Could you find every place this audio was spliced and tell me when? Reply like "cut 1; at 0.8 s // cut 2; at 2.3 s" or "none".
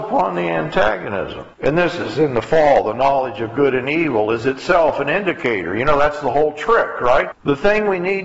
cut 1; at 1.5 s // cut 2; at 7.3 s

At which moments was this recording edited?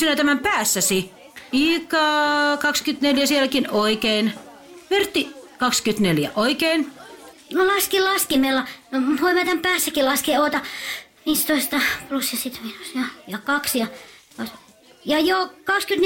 cut 1; at 1.5 s // cut 2; at 7.3 s

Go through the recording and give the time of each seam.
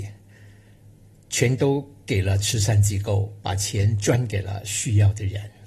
none

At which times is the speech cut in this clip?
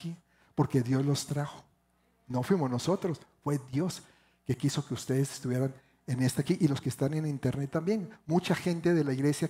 none

